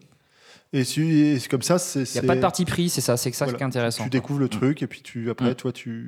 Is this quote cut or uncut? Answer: uncut